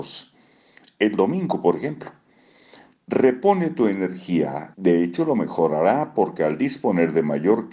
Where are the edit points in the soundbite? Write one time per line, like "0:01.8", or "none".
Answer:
0:04.7